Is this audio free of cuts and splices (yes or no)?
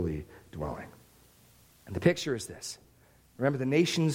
yes